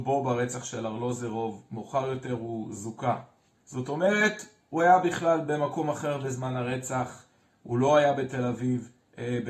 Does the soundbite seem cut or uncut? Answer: cut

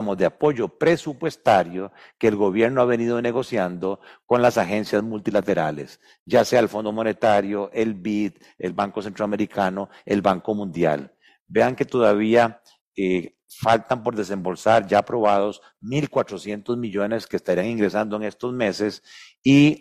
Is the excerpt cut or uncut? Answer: uncut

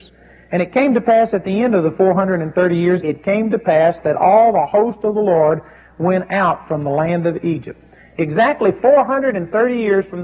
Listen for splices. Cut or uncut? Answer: cut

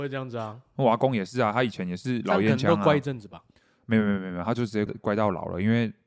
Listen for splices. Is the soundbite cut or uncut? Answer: cut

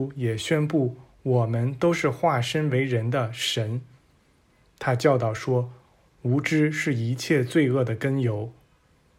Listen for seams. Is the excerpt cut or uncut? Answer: uncut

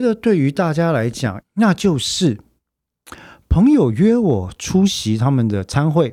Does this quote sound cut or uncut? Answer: cut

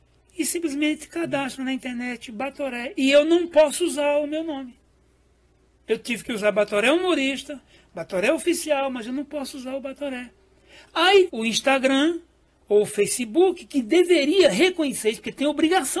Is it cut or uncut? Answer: cut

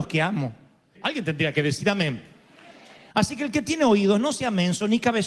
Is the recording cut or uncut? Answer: cut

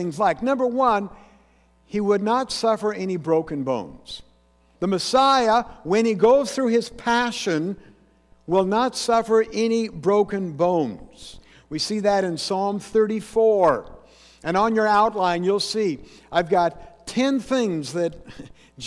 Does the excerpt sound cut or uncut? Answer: cut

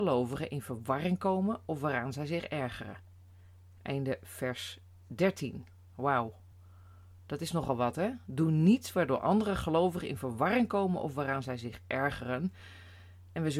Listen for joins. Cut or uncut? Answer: uncut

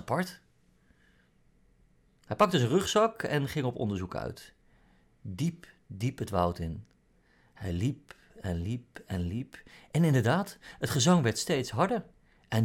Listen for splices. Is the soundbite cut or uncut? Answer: uncut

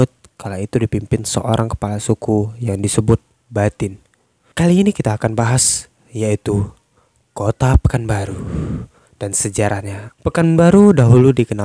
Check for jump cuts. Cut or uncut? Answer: cut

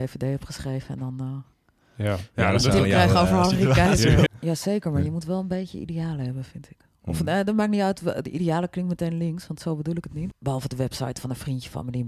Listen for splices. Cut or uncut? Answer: cut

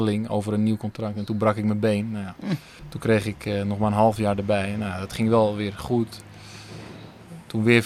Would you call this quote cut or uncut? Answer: uncut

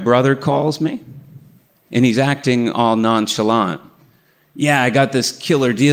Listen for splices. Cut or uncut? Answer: uncut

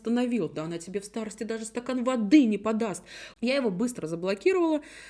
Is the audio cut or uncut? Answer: cut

